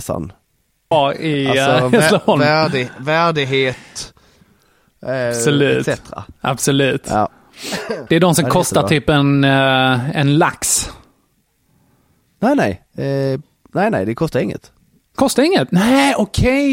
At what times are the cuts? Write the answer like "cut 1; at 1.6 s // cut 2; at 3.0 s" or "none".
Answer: cut 1; at 0.9 s // cut 2; at 8.1 s